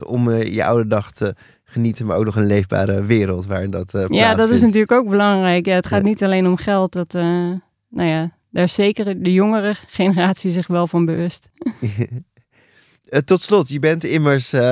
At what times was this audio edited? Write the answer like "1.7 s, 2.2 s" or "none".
none